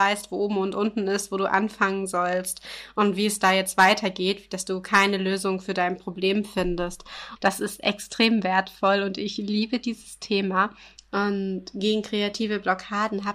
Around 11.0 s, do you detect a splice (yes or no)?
yes